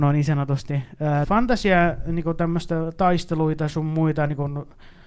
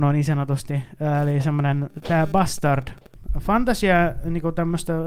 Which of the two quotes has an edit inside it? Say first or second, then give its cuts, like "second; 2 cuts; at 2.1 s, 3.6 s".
first; 1 cut; at 1.2 s